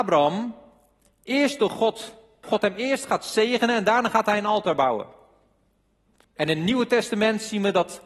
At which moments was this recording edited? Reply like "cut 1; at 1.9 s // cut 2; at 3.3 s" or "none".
cut 1; at 2.4 s // cut 2; at 6.2 s